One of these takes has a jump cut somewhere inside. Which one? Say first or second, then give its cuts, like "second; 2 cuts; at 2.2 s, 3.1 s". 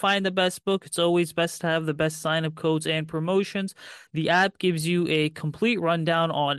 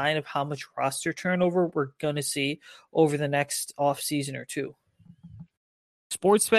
first; 1 cut; at 4.1 s